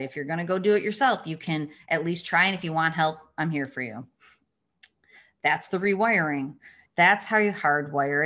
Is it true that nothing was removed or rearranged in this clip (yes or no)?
no